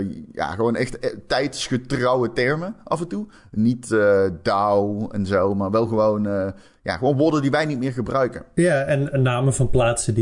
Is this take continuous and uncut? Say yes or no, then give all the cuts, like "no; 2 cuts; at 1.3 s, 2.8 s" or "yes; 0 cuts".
yes; 0 cuts